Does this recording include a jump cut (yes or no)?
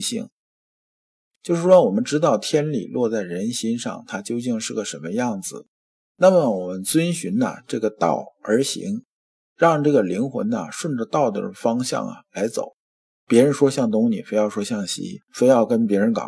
yes